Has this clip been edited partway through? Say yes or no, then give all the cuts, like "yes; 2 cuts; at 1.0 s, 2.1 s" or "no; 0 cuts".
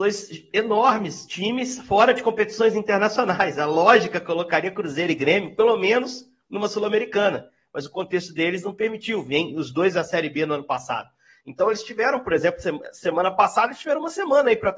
no; 0 cuts